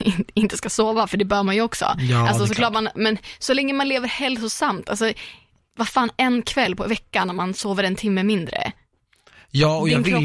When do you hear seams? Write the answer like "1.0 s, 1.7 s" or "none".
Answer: none